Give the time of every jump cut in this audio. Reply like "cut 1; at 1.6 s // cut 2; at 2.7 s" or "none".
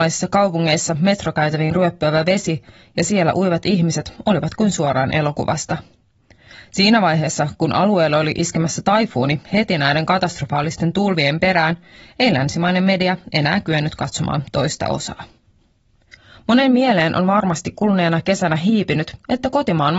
none